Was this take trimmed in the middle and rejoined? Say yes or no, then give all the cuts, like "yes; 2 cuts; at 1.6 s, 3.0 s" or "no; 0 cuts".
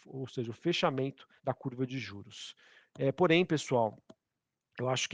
yes; 1 cut; at 1.4 s